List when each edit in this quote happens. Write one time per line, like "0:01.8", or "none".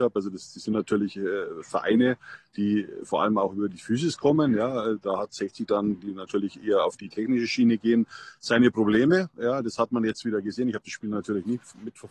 none